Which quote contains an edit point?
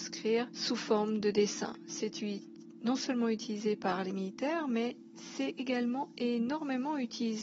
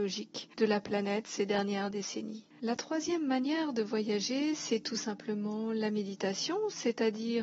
second; 1 cut; at 2.5 s

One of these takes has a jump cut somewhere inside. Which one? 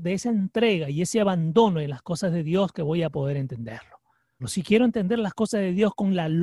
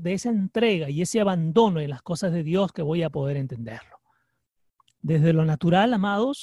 first; 1 cut; at 4.4 s

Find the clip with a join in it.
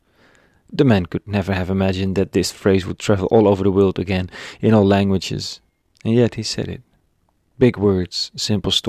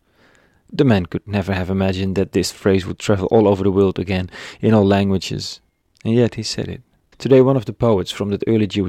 second; 1 cut; at 7.1 s

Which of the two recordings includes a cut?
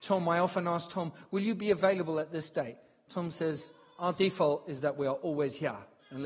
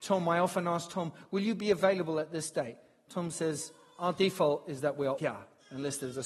second; 1 cut; at 5.2 s

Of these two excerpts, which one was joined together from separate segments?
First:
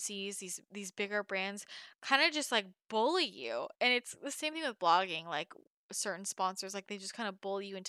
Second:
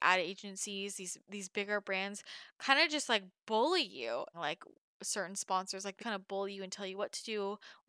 second; 2 cuts; at 4.3 s, 6.0 s

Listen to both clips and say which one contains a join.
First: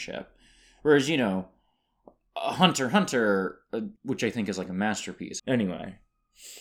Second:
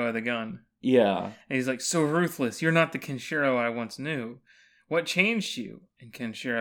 first; 2 cuts; at 4.0 s, 5.4 s

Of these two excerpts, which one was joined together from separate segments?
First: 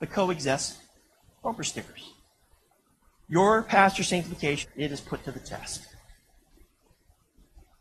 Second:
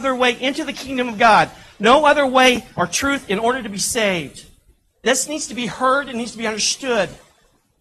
first; 1 cut; at 4.6 s

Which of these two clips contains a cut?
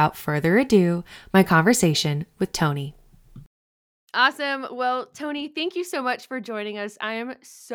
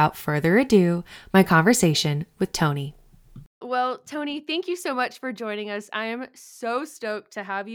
second; 1 cut; at 3.6 s

